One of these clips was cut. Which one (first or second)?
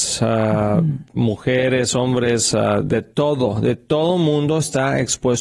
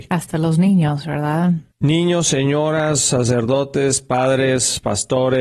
second